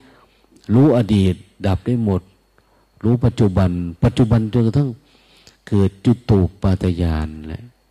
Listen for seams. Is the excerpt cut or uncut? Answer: uncut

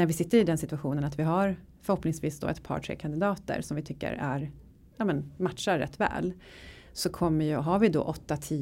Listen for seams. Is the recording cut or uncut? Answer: uncut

